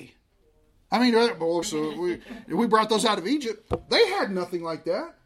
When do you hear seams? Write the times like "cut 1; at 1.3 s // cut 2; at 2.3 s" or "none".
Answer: cut 1; at 1.6 s